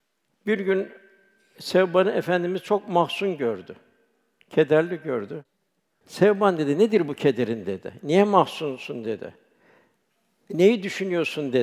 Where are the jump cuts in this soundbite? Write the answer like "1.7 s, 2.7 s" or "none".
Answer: none